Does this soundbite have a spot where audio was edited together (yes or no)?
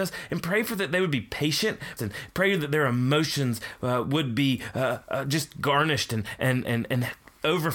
yes